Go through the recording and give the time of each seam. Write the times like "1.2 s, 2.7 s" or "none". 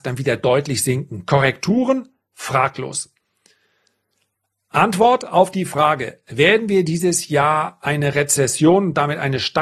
none